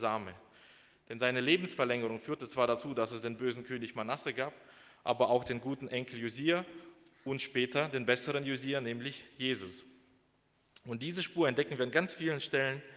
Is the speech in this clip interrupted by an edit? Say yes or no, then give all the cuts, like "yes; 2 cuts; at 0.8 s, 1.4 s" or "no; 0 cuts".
yes; 1 cut; at 0.9 s